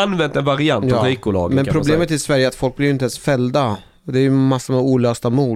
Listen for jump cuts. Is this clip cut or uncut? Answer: uncut